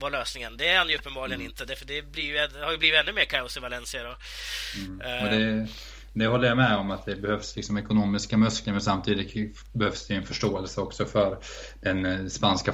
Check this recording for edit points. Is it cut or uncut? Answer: uncut